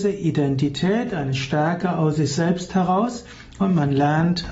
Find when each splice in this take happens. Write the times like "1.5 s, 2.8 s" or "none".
none